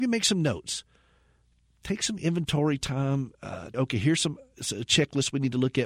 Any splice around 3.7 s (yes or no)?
yes